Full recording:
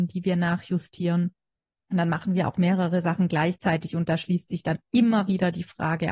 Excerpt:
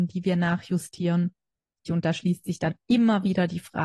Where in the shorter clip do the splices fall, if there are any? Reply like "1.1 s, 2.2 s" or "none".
1.8 s

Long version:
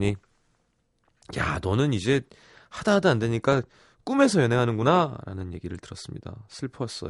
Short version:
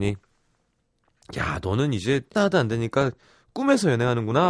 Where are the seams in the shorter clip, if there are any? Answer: 2.3 s

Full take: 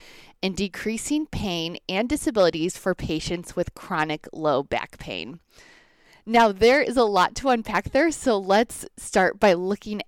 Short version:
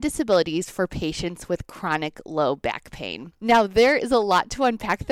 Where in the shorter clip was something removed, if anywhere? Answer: 3.4 s

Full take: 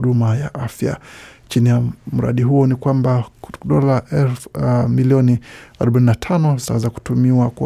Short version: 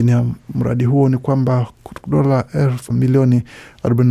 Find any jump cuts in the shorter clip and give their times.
2.9 s

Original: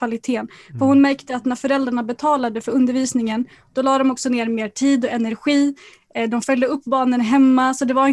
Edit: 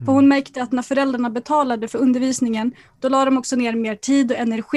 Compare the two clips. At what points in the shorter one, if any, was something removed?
none

